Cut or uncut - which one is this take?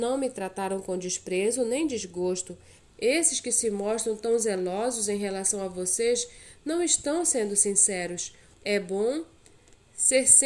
cut